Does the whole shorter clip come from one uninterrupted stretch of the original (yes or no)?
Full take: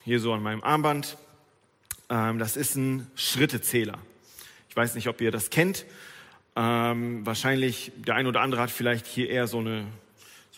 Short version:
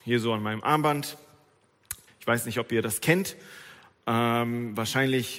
no